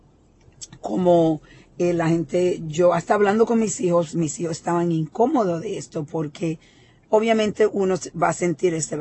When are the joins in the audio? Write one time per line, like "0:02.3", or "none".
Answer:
none

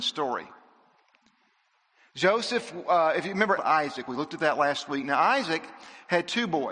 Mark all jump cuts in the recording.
0:03.6

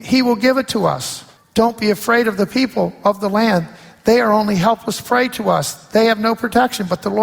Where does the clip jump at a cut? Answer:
0:01.4

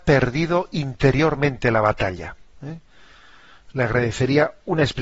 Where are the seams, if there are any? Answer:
none

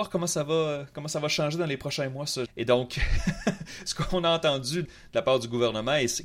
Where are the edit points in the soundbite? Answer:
0:02.5
0:04.9

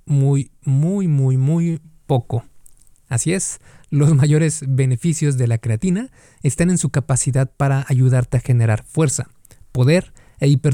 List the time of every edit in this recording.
0:01.8

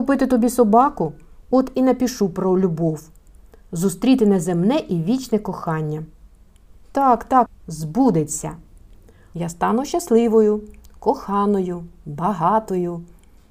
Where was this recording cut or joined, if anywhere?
0:07.5
0:09.3

